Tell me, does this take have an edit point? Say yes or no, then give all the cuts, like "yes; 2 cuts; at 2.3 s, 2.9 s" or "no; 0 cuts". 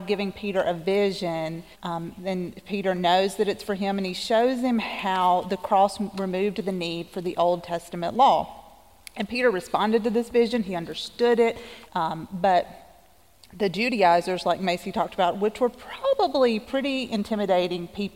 yes; 2 cuts; at 1.7 s, 11.9 s